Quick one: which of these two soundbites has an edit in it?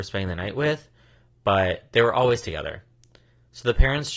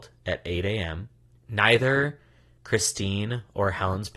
second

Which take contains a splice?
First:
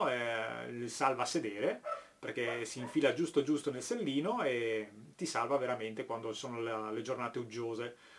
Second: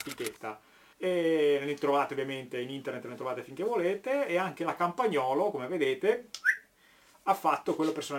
second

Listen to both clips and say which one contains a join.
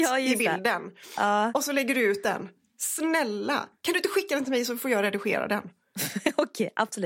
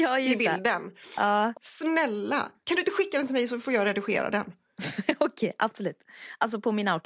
second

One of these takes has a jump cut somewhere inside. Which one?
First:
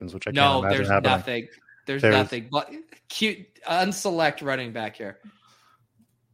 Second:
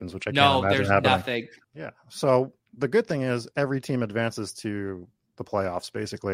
second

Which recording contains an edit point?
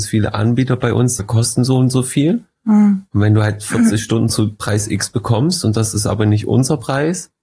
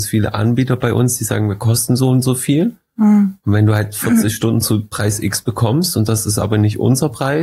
first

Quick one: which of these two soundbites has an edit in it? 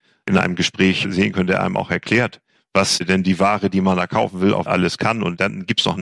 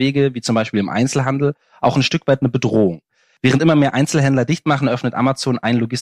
first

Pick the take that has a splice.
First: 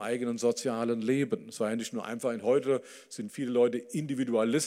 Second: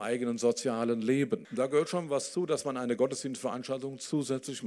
second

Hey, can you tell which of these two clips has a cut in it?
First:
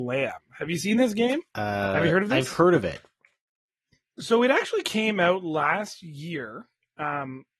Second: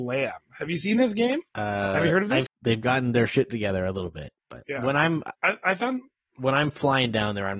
second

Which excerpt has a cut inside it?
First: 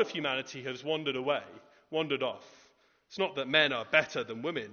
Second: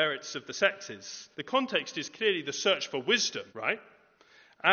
second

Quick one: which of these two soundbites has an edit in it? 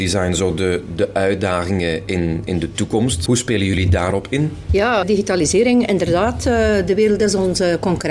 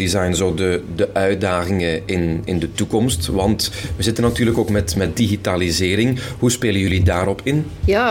first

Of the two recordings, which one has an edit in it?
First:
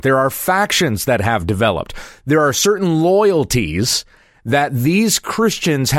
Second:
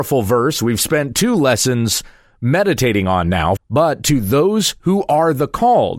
second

